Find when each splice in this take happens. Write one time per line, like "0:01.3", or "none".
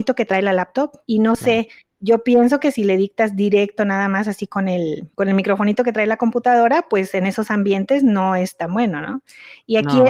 0:01.0
0:05.1

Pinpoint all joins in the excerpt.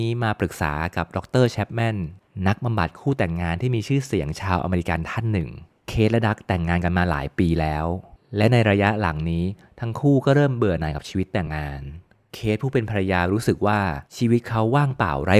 0:11.5
0:14.1

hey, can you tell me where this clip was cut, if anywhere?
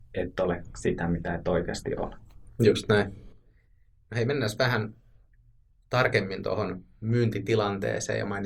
none

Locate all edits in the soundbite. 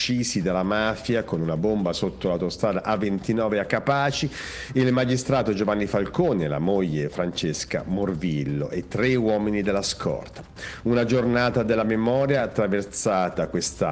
none

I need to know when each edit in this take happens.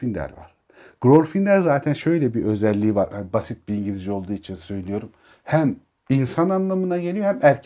0:03.1

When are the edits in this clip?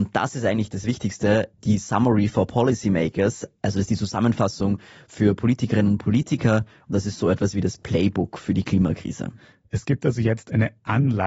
none

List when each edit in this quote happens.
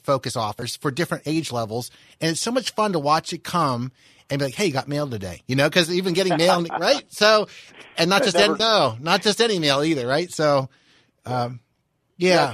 0:08.6

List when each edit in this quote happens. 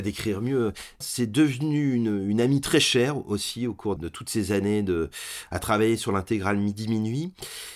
0:01.0
0:04.0

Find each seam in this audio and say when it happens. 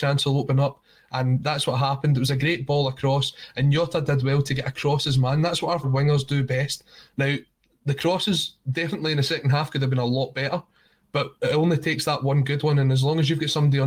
0:05.8
0:07.1

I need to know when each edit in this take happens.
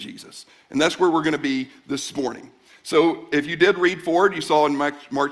none

